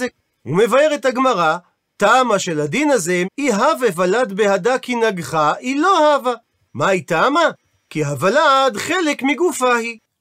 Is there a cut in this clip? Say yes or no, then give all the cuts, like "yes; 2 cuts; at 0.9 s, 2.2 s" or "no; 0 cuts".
yes; 2 cuts; at 3.2 s, 6.7 s